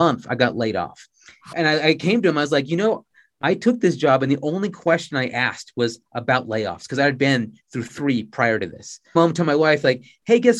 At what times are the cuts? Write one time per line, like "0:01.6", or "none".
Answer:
0:01.5
0:09.2